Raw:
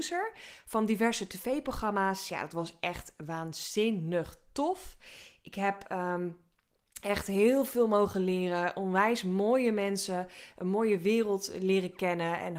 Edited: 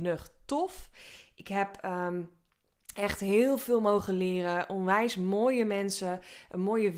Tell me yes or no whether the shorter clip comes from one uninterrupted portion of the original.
yes